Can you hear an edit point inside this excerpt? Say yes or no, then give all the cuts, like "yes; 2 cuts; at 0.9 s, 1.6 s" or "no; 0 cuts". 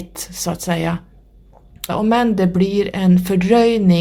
yes; 1 cut; at 1.9 s